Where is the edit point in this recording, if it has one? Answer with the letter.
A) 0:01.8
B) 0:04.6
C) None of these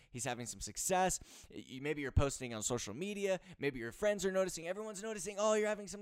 B